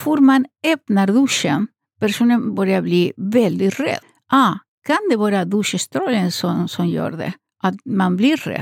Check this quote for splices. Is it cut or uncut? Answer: uncut